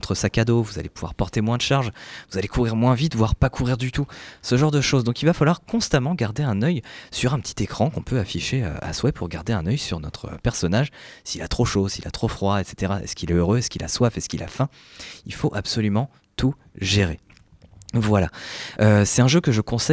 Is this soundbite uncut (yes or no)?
yes